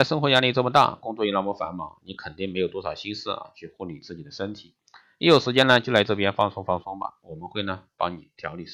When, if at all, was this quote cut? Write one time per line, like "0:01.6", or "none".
none